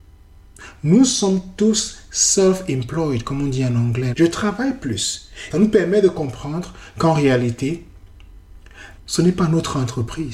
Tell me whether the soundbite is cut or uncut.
cut